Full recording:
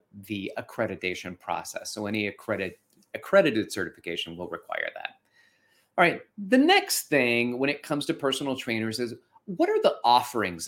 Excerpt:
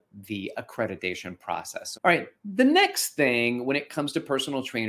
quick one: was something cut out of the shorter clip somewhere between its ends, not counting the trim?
yes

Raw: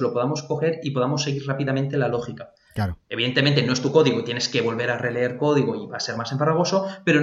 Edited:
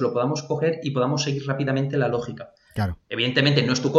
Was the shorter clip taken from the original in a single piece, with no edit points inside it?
yes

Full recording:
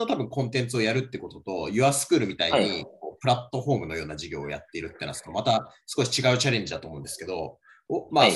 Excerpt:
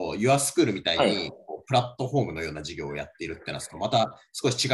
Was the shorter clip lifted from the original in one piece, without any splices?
yes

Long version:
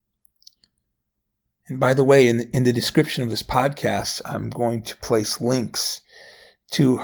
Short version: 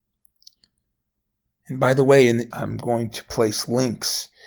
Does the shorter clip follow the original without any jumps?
no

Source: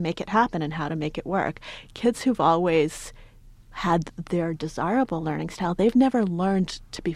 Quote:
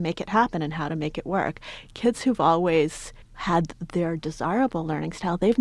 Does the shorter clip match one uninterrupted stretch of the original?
no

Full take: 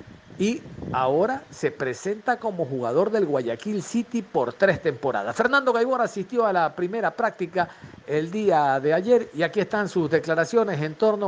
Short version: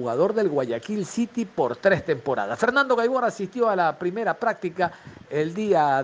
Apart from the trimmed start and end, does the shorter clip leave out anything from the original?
no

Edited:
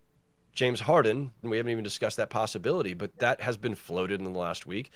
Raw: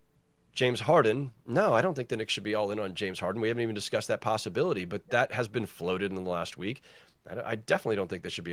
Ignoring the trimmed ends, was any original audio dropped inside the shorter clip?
yes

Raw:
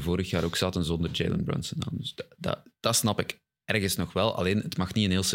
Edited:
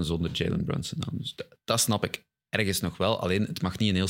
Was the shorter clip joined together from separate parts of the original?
yes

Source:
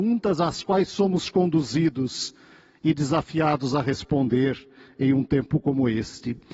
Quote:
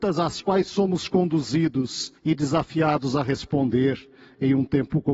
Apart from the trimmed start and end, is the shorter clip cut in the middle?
yes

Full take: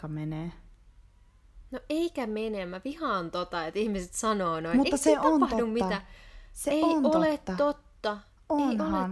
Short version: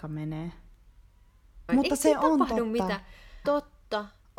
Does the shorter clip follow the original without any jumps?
no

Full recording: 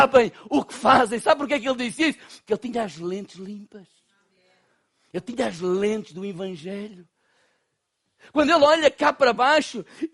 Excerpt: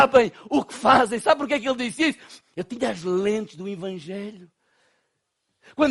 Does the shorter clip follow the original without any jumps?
no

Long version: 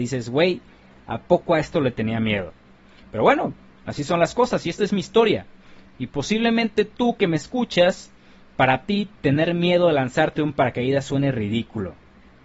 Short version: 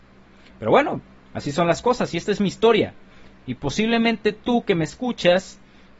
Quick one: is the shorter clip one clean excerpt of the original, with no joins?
yes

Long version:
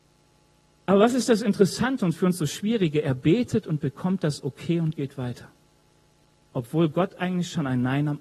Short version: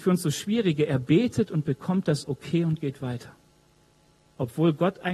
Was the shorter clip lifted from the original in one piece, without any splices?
yes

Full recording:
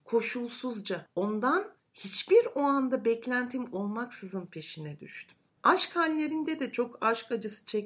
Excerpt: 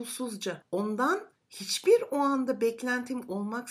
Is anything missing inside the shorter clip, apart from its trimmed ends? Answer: no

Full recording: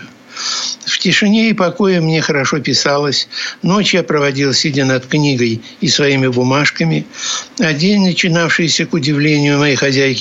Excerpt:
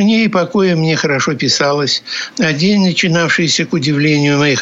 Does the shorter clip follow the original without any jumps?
no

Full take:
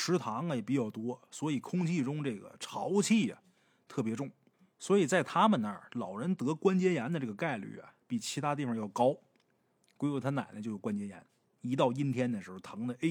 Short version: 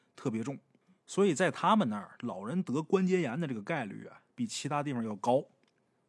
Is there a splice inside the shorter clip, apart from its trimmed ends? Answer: no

